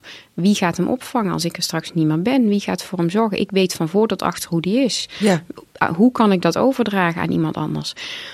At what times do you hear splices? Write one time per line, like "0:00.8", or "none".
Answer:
none